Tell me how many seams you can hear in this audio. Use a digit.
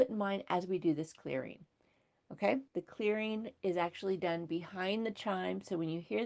1